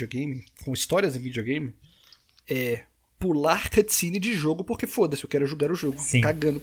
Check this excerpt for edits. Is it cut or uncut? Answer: uncut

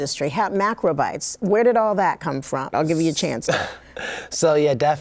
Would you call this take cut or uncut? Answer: cut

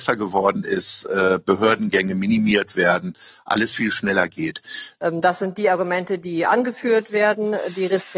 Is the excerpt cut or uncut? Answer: cut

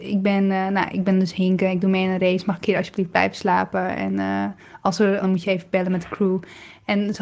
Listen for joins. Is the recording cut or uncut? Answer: cut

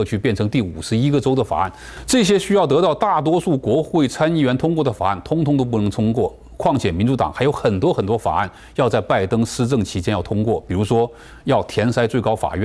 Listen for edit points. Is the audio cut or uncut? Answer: uncut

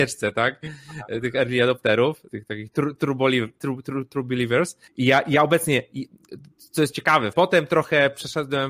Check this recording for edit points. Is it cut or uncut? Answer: cut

